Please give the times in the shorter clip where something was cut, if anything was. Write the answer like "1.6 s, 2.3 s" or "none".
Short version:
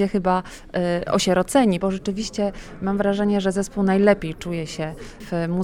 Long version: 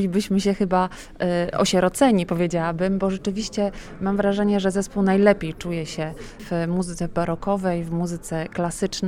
1.8 s